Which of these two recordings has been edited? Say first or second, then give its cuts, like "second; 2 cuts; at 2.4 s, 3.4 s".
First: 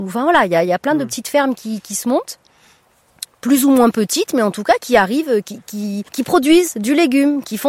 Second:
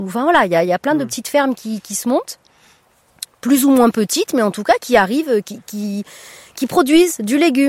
first; 1 cut; at 6.1 s